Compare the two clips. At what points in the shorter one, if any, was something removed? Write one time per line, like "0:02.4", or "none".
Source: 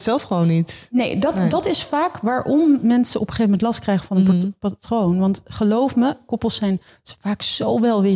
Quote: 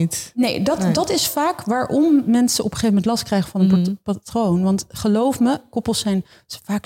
none